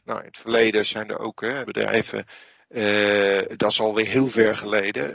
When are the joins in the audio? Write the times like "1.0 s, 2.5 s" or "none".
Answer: 1.7 s